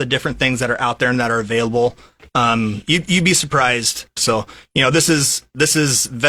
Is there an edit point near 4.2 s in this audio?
yes; 1 cut; at 4.2 s

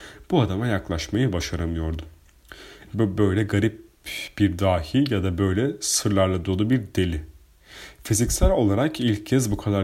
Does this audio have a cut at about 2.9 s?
yes; 1 cut; at 2.9 s

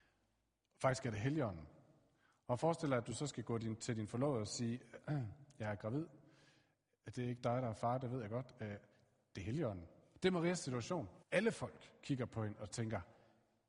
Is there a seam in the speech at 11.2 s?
yes; 2 cuts; at 10.1 s, 11.2 s

